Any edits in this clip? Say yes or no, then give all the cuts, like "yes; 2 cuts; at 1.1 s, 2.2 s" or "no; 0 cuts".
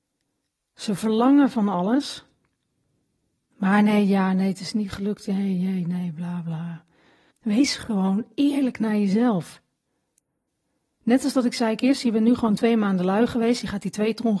yes; 1 cut; at 7.3 s